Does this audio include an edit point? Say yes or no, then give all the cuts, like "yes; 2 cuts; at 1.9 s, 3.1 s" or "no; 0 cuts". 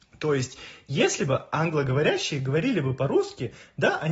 no; 0 cuts